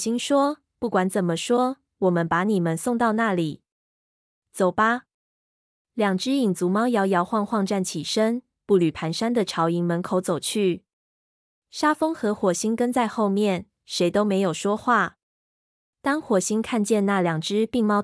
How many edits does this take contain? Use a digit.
0